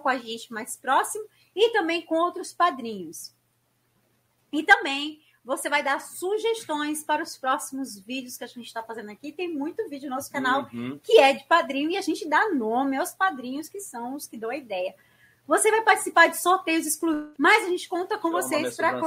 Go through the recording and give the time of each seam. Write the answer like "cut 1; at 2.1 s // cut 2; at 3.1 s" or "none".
cut 1; at 17.3 s